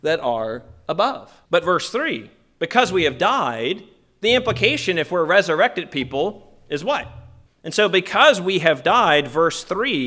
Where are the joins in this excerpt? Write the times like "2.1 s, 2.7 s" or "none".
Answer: 1.5 s, 7.5 s